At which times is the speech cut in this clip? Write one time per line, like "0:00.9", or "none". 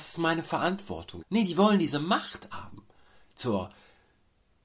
0:01.2
0:02.5